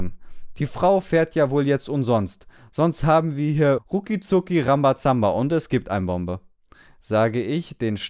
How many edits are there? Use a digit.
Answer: 1